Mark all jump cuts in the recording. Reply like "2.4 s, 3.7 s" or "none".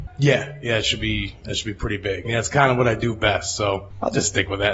2.2 s

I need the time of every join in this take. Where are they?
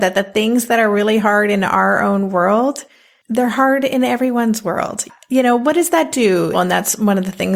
6.5 s

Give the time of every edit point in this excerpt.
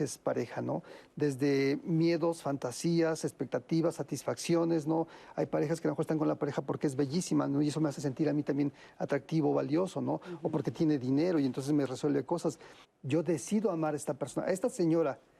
12.8 s

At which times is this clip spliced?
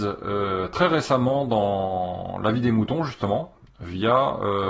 none

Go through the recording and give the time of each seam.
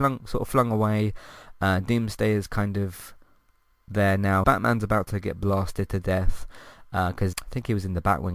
4.4 s, 7.3 s

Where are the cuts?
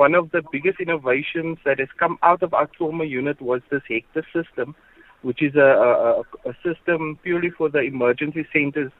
none

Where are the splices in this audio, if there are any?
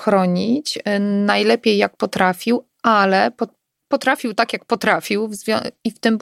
none

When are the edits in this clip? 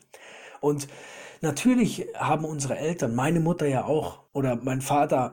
4.3 s

